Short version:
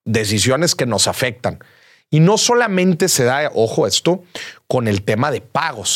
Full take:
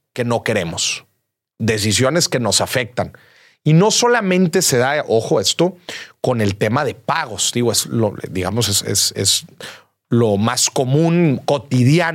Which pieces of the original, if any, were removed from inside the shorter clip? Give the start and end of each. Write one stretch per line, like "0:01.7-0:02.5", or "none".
none